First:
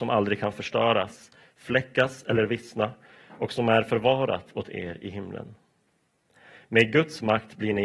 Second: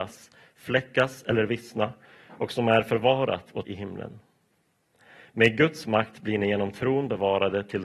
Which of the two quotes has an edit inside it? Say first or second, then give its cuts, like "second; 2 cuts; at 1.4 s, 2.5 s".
second; 1 cut; at 3.6 s